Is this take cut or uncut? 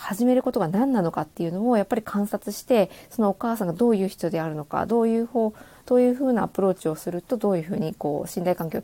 uncut